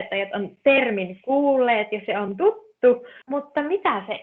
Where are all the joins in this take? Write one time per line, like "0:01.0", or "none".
0:03.2